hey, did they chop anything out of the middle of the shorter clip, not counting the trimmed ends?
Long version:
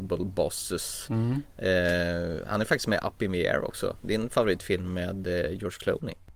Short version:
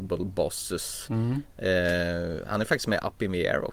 no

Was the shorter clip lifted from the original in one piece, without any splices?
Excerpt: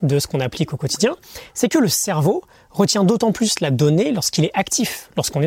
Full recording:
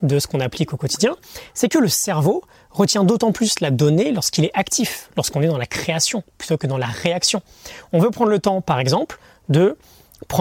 yes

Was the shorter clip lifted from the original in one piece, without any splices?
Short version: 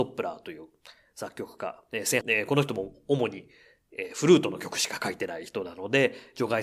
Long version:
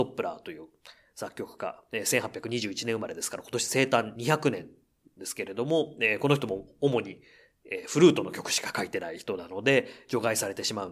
no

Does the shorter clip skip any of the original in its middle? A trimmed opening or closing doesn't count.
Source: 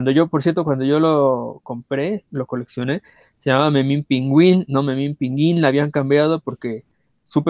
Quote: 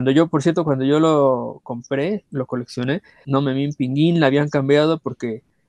yes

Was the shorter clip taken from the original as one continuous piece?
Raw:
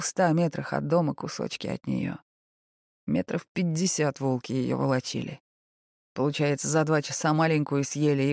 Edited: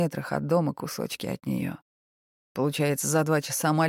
no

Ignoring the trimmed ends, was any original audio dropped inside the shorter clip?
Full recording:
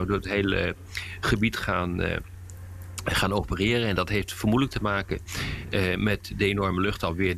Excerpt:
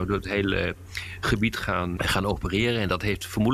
yes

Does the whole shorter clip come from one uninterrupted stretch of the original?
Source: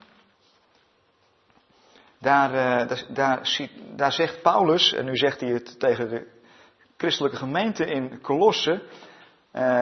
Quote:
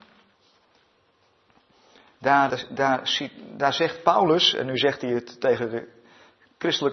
no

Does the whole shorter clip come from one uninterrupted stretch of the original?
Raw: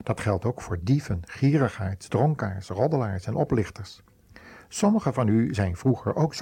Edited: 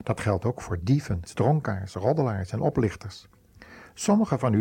no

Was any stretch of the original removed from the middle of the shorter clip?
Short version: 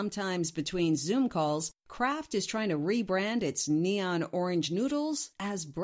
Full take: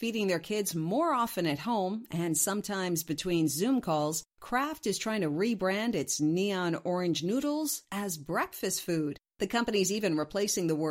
no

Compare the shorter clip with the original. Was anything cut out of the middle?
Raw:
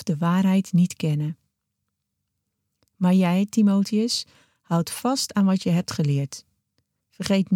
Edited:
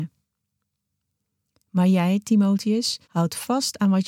yes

